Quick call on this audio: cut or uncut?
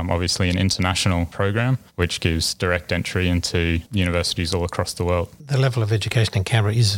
cut